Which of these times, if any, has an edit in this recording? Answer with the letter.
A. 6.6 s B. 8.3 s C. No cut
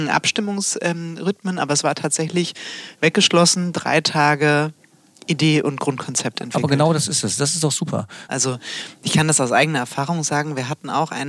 B